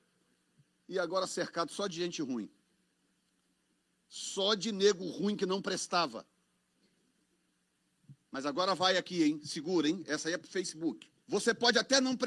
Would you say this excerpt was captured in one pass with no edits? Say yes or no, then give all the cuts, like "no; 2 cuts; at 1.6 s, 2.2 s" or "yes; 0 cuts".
no; 1 cut; at 11.2 s